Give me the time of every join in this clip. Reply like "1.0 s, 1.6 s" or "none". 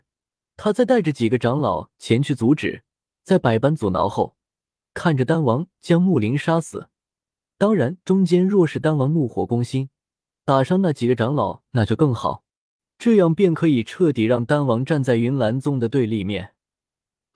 none